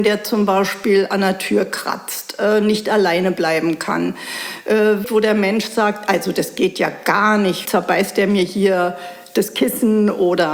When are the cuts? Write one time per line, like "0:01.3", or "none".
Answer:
0:05.0
0:07.7